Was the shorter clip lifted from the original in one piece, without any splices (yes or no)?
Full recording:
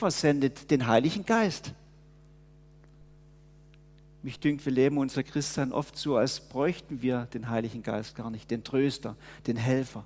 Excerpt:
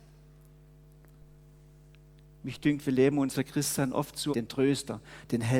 no